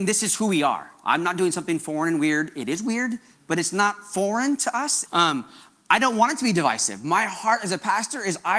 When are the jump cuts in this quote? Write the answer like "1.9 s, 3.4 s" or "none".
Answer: 5.1 s